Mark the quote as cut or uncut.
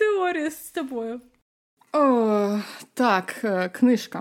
uncut